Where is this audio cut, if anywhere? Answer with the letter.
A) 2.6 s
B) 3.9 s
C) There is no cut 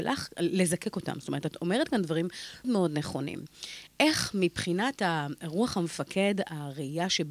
A